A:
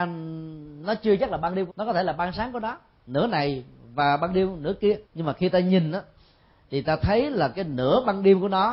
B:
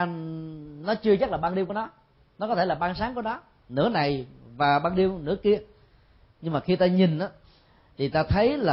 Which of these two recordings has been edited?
A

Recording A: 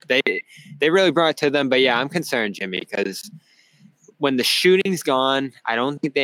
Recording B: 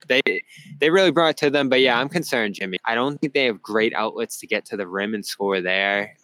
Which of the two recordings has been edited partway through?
B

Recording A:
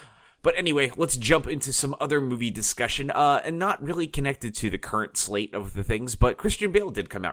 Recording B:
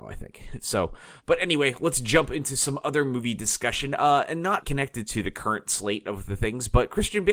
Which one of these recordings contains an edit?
B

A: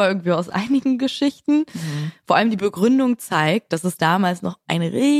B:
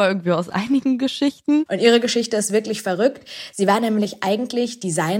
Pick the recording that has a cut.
B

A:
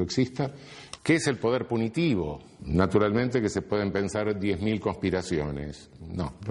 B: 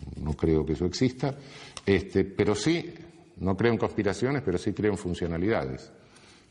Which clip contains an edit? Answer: A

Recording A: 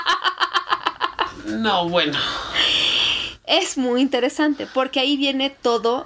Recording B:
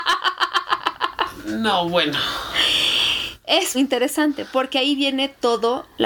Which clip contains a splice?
B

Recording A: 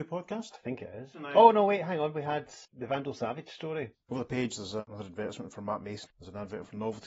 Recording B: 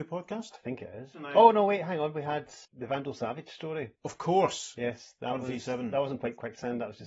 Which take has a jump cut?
A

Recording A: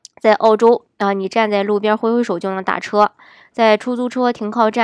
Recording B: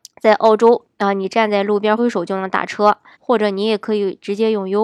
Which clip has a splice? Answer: B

